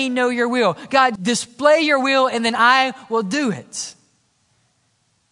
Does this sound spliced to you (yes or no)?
yes